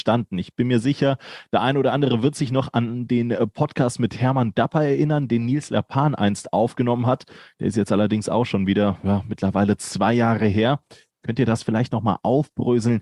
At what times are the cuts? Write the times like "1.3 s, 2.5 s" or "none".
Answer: none